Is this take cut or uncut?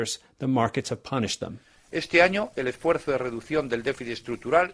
uncut